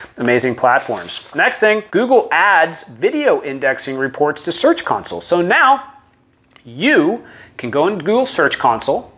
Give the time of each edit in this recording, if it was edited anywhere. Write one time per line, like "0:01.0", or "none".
0:01.9